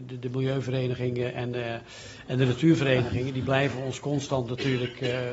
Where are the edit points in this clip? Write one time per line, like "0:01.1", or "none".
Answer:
none